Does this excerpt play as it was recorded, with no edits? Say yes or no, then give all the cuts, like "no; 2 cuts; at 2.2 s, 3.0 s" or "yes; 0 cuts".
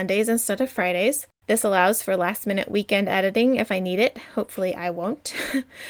yes; 0 cuts